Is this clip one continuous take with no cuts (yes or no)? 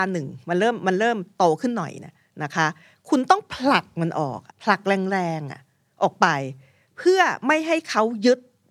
no